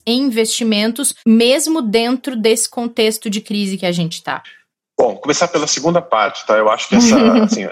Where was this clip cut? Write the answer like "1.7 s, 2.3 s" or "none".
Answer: 1.2 s